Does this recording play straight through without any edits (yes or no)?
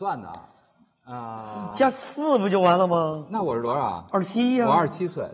yes